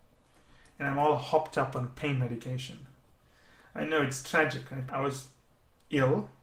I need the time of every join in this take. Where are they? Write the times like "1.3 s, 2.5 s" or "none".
4.9 s